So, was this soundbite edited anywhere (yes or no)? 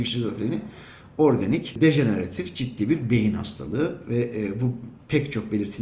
no